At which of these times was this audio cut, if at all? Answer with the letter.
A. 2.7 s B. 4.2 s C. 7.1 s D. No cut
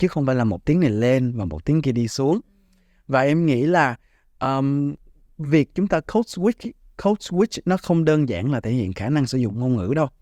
D